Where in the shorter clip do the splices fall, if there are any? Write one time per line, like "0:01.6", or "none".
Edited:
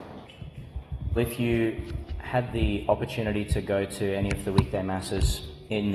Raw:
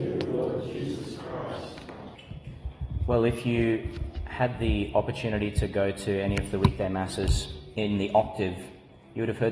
0:01.2